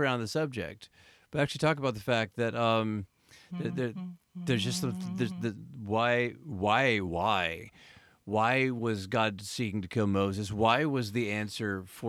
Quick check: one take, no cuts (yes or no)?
yes